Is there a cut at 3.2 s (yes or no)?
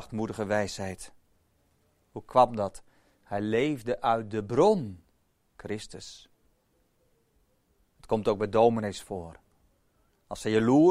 no